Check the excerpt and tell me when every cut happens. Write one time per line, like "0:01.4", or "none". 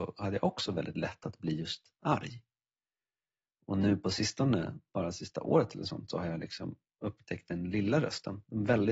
none